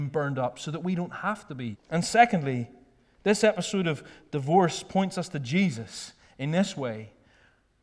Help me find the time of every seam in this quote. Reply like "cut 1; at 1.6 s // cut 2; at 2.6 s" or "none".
cut 1; at 1.7 s